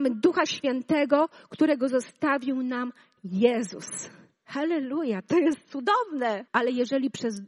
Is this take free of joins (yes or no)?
no